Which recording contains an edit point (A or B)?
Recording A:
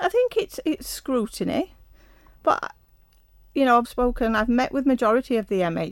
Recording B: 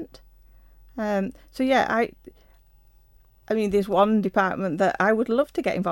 A